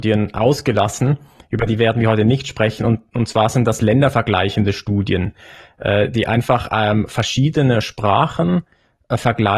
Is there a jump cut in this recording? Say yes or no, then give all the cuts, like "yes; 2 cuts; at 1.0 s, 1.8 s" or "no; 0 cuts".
no; 0 cuts